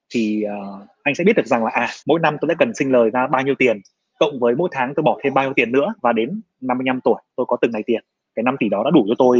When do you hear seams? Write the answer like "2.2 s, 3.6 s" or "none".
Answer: 2.0 s, 6.0 s

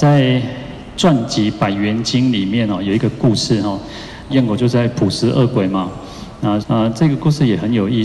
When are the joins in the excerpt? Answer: 4.3 s, 6.6 s

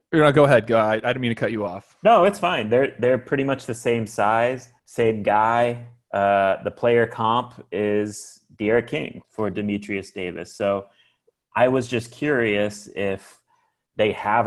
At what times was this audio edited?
4.8 s, 9.2 s

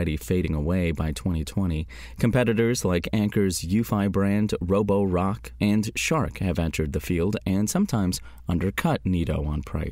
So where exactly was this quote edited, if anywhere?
none

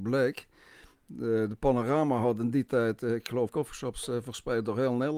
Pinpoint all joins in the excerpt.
3.5 s

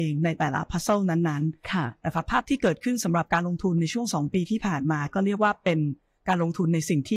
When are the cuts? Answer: none

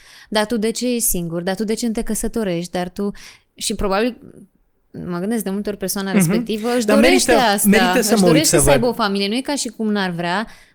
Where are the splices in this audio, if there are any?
none

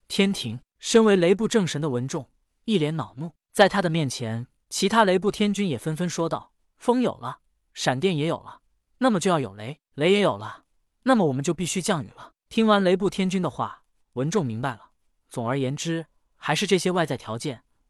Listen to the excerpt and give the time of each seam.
4.6 s

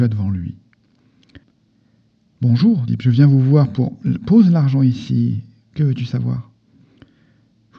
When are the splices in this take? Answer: 2.9 s

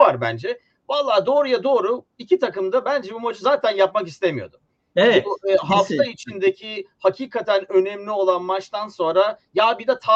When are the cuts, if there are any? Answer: none

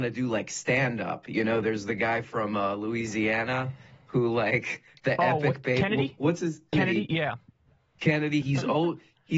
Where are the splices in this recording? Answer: 6.7 s, 8.4 s

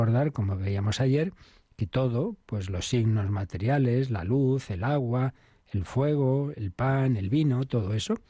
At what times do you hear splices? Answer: none

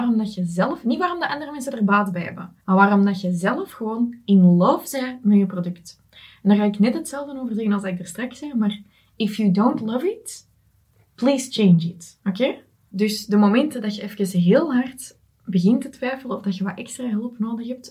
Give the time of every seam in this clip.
2.6 s, 12.9 s

